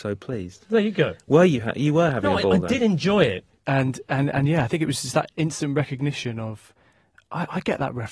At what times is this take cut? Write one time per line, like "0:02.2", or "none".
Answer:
0:03.5